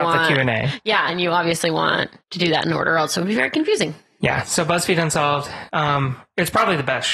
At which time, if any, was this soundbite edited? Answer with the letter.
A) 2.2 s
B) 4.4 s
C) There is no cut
A